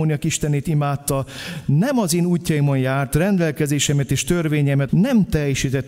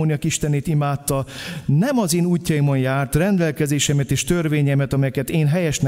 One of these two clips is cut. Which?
first; 1 cut; at 4.9 s

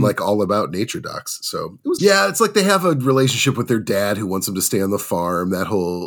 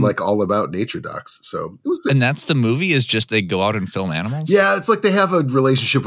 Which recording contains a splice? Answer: first; 1 cut; at 2.0 s

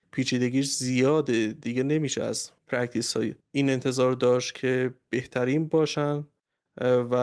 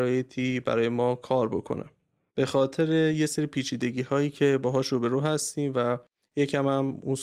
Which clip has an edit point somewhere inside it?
second; 1 cut; at 2.3 s

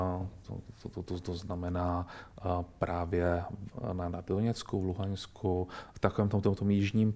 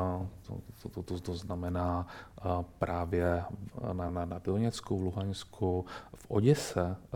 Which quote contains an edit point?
first; 2 cuts; at 4.1 s, 5.9 s

